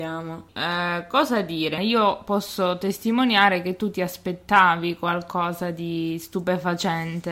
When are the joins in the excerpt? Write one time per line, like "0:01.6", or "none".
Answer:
0:01.8